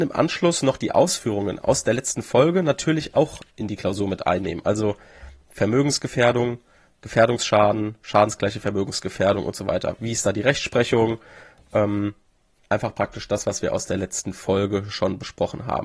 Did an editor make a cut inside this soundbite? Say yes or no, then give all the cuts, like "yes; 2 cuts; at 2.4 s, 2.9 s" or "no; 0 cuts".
no; 0 cuts